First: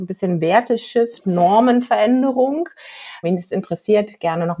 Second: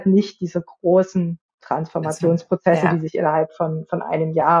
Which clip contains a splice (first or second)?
first